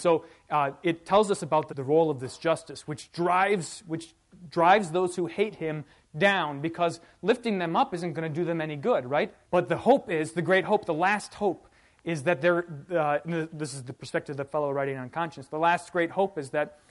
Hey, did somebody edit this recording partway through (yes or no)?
yes